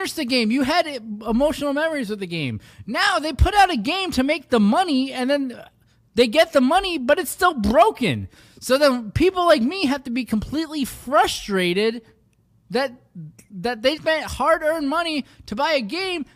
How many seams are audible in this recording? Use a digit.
1